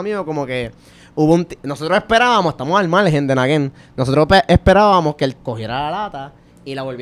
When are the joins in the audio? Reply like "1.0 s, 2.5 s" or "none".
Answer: 5.4 s